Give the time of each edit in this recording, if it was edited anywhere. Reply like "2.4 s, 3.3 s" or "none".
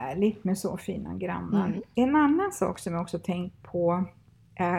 none